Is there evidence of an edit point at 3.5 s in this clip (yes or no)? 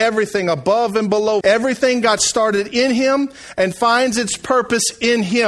no